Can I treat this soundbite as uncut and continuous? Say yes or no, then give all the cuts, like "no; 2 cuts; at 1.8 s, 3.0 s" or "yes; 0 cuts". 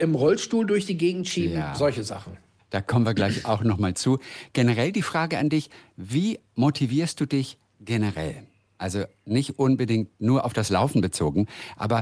yes; 0 cuts